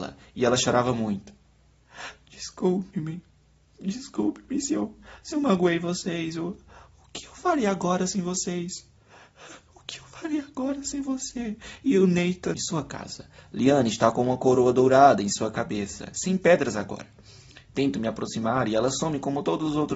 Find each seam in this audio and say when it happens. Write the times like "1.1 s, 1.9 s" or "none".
12.5 s